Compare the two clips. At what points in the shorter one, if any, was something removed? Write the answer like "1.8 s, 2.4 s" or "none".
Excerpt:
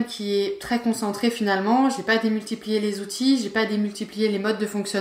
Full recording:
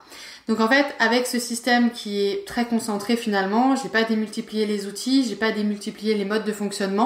none

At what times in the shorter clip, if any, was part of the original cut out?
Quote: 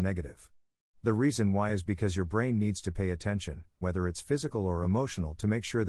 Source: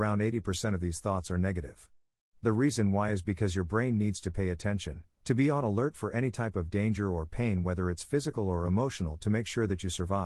3.8 s

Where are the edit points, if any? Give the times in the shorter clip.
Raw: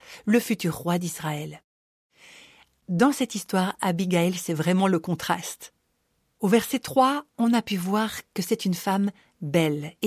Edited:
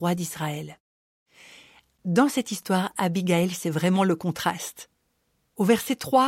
none

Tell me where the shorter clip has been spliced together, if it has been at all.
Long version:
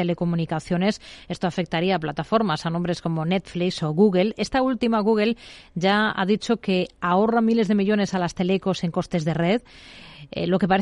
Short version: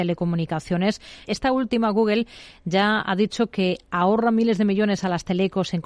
1.2 s

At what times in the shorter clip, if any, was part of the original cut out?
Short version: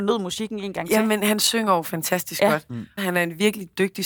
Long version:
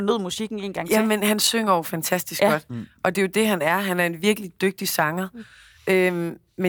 3.0 s

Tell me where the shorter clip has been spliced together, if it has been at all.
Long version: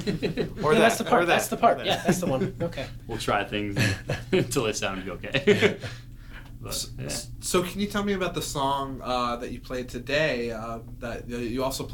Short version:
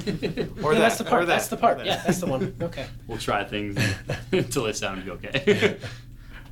none

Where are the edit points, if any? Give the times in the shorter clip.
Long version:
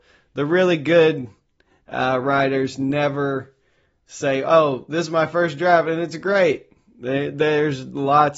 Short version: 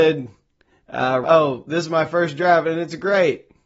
1.2 s

